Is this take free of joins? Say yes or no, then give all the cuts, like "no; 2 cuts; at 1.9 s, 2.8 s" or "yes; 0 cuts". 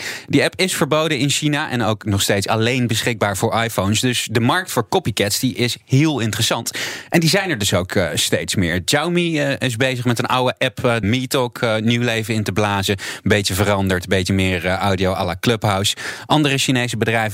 no; 1 cut; at 11.0 s